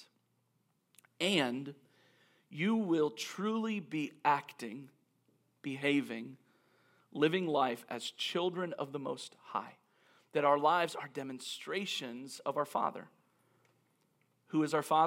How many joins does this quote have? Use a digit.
0